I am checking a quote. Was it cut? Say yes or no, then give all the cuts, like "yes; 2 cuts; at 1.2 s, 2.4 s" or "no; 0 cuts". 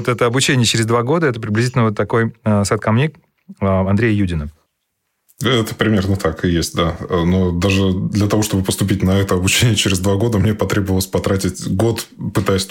no; 0 cuts